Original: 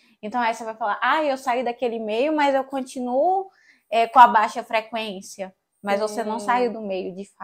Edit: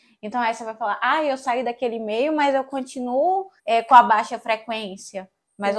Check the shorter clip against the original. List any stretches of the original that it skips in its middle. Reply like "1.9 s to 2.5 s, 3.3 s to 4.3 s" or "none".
3.6 s to 3.8 s